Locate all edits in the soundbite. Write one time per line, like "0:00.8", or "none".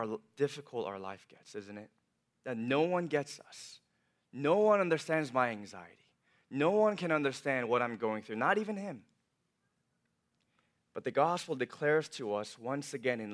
none